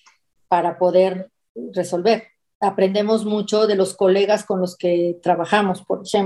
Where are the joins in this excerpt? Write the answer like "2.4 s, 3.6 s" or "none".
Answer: none